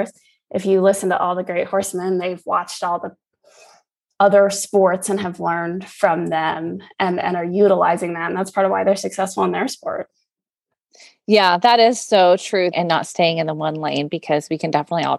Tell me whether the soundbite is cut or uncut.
cut